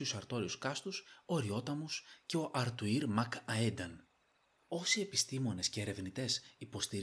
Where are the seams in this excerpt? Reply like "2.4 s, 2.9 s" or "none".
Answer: 4.6 s